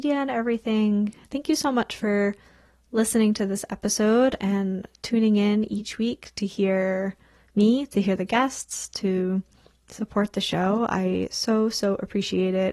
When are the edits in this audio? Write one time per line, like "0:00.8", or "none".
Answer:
none